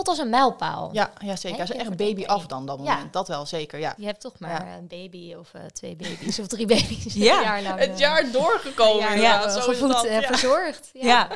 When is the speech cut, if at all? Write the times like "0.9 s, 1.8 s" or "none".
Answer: 4.0 s